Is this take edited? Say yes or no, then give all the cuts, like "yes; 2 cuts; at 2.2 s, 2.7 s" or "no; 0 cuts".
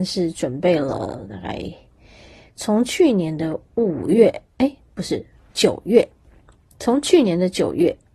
yes; 1 cut; at 5.5 s